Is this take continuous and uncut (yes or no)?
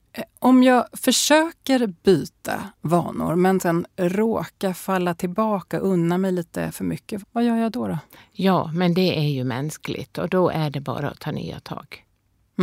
no